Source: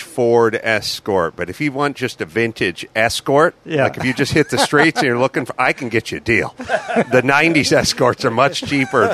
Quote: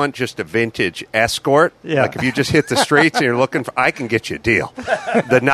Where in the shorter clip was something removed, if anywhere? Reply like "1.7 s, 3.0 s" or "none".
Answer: none